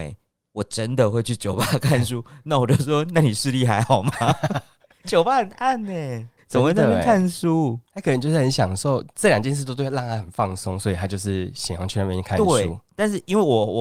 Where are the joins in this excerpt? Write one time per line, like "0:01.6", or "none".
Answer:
none